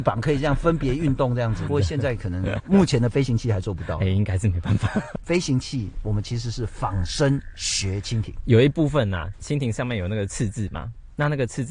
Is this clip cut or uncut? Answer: cut